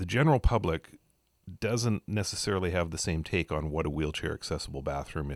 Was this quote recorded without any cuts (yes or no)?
yes